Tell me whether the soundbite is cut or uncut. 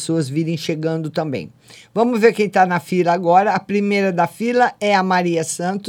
uncut